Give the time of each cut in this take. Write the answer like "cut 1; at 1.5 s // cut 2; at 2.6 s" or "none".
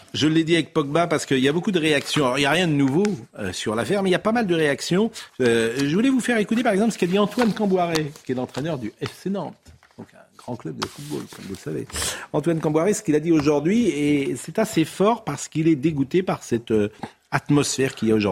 none